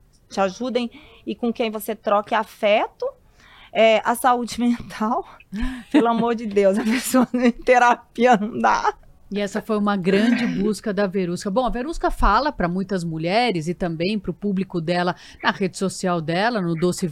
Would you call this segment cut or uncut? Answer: uncut